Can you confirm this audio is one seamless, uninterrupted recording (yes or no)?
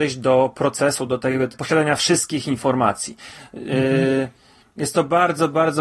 no